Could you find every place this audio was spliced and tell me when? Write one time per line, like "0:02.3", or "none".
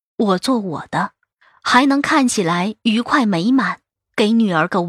none

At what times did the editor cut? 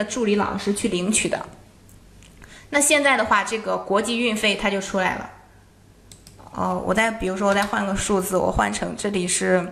none

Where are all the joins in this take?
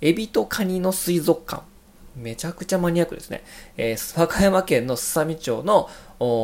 none

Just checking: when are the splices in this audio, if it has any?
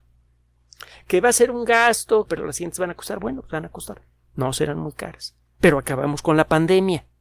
0:02.3

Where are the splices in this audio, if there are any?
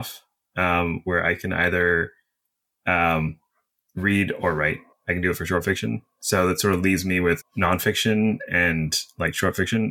0:04.9
0:07.4

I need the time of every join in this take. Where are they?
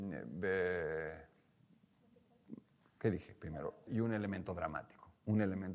0:03.9

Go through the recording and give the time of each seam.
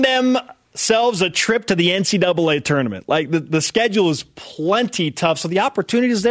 none

